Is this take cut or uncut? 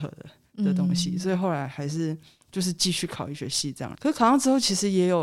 cut